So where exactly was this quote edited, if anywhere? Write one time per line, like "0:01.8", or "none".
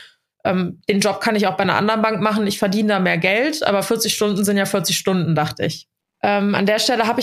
0:06.0